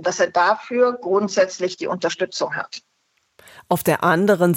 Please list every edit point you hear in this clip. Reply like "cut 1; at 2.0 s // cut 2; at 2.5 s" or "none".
none

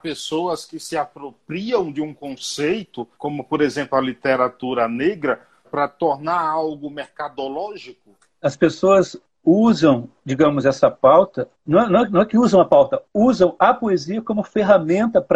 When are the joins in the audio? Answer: cut 1; at 3.1 s // cut 2; at 5.6 s // cut 3; at 8.4 s

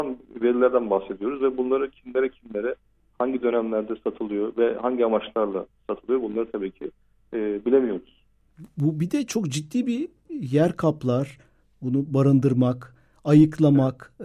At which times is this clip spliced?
none

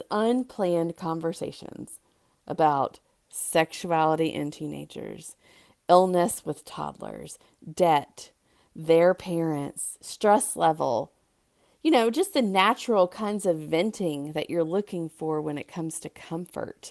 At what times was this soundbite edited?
none

